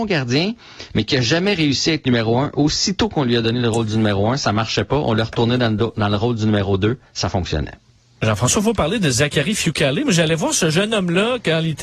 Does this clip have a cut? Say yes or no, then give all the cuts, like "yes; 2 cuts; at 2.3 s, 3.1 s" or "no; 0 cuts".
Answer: no; 0 cuts